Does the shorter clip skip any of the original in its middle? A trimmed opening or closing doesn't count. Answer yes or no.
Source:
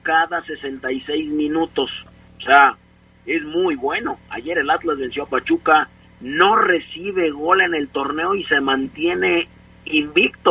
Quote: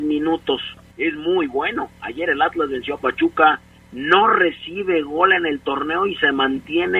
yes